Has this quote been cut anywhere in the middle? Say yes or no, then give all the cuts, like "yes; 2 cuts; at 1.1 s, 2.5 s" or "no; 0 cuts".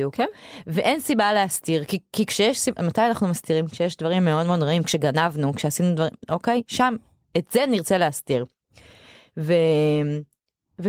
yes; 1 cut; at 2.8 s